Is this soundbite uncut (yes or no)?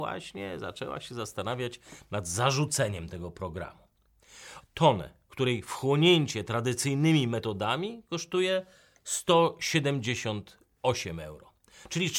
no